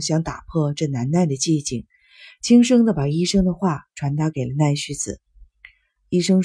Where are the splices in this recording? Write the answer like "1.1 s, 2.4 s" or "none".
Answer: none